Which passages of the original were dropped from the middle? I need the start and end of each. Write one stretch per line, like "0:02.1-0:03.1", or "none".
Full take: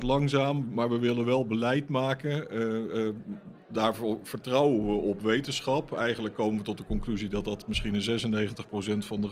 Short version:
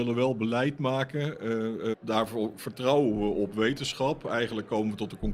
0:03.0-0:03.6